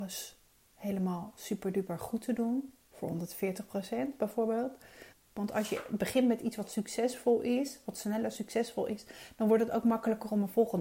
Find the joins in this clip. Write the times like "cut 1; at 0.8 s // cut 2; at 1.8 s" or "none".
cut 1; at 5.1 s